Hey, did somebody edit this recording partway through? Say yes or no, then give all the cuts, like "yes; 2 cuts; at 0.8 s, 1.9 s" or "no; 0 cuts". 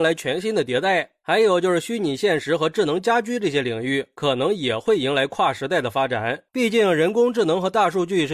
yes; 1 cut; at 6.5 s